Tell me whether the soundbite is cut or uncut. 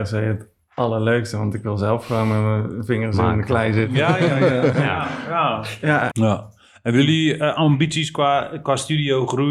cut